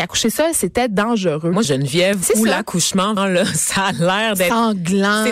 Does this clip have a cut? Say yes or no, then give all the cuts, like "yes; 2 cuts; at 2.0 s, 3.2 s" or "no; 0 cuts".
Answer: yes; 2 cuts; at 1.6 s, 3.2 s